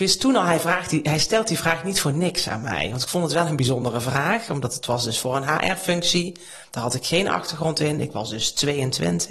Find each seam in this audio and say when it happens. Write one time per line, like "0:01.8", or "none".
none